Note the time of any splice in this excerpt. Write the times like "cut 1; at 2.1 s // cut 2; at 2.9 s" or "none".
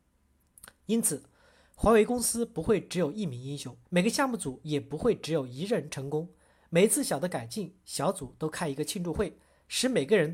cut 1; at 3.8 s